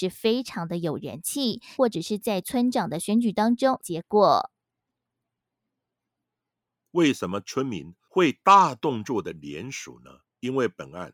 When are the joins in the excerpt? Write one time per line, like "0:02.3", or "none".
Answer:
0:01.8
0:03.8